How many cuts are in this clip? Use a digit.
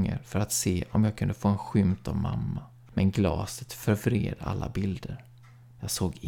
0